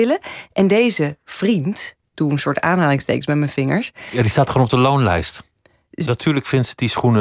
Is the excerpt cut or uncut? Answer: cut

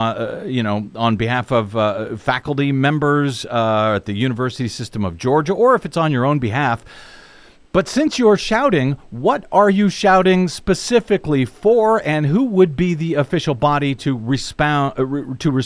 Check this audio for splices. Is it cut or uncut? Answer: uncut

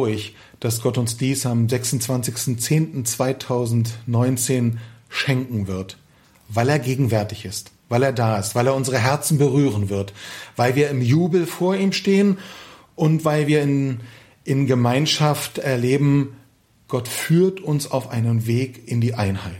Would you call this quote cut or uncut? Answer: uncut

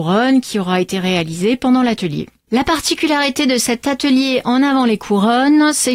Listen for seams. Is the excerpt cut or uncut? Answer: uncut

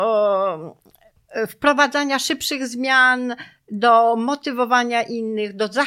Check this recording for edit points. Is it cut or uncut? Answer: uncut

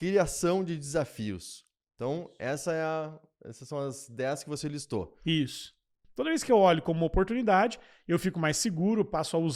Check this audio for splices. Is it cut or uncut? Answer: cut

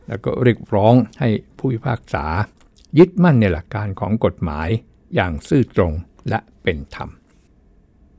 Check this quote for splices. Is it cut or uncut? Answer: cut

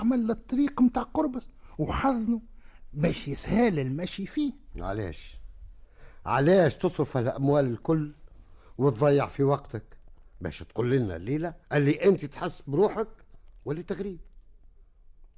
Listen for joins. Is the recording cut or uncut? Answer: cut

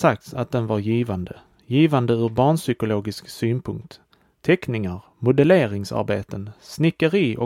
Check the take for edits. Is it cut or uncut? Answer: uncut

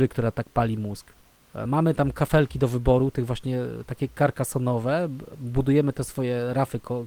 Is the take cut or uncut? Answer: uncut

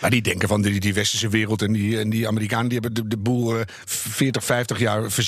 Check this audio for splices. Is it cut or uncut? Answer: uncut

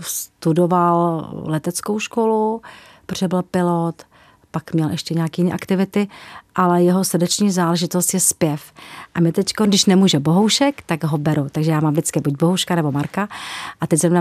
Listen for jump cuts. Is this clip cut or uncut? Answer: uncut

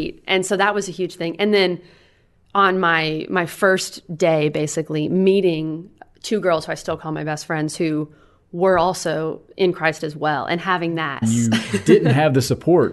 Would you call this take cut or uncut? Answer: cut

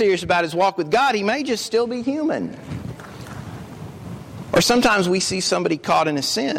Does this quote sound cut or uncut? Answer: uncut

